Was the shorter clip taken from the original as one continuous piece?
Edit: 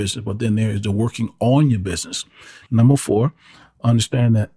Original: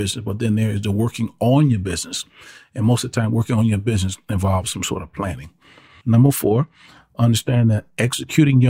no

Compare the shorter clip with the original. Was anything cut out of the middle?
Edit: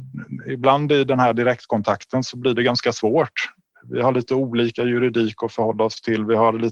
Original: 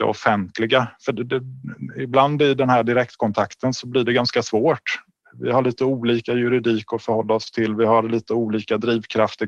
no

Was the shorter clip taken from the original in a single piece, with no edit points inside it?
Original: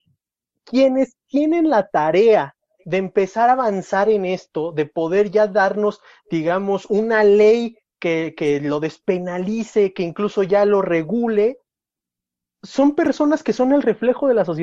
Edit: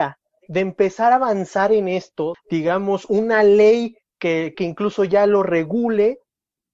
no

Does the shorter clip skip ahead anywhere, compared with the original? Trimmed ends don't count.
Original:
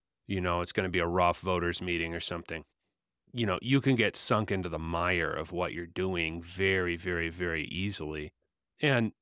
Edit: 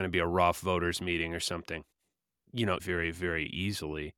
yes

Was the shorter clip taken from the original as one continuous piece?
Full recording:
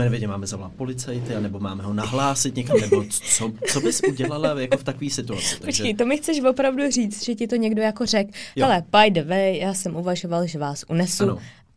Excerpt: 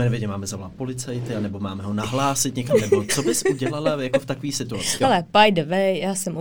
no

